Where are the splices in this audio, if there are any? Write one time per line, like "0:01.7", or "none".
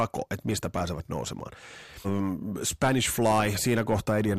0:02.0